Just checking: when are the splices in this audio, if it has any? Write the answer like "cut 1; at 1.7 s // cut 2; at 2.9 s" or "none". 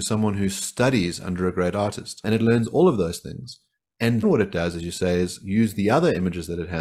cut 1; at 2.2 s // cut 2; at 4.2 s